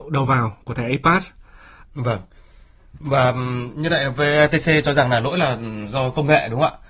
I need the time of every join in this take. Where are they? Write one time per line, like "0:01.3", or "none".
0:01.8